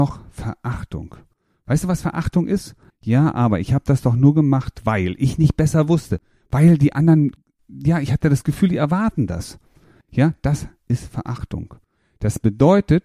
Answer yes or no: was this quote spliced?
yes